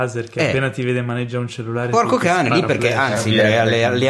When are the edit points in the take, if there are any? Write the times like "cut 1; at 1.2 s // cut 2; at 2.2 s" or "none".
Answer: none